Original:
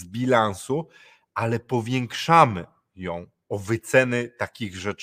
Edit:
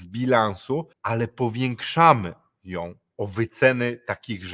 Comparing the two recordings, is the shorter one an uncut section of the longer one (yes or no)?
no